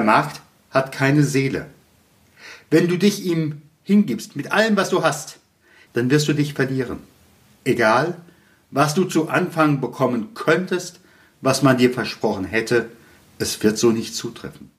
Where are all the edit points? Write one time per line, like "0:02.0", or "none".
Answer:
0:05.9

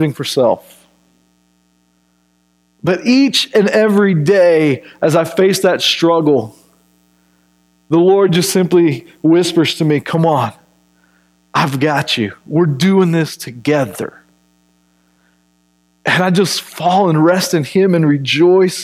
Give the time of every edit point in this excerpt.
none

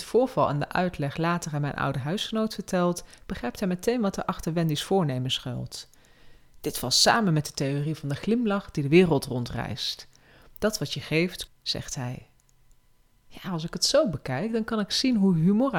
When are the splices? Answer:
0:11.5

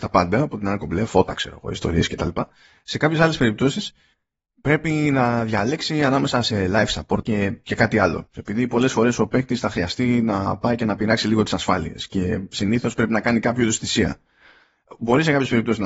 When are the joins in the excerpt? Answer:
0:07.2
0:08.4

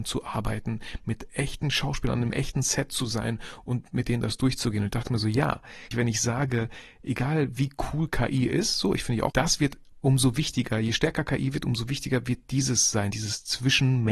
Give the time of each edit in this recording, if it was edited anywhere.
0:05.9
0:09.3

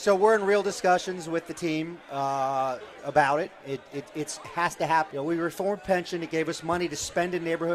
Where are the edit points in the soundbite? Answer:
0:05.1

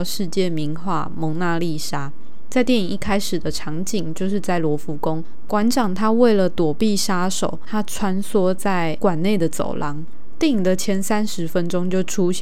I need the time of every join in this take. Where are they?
none

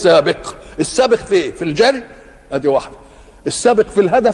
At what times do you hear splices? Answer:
none

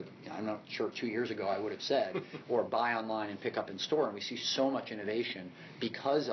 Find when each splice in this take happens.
none

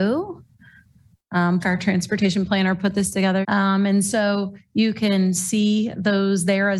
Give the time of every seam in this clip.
0:01.6
0:03.4

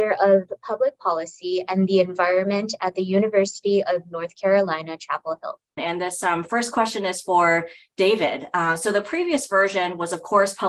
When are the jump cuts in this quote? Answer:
0:05.8

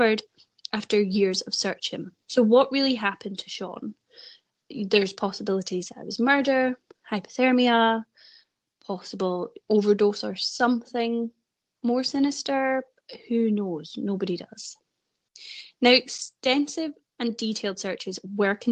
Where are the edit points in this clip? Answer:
0:02.2

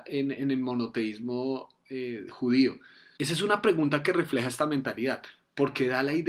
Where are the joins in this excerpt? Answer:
0:03.2

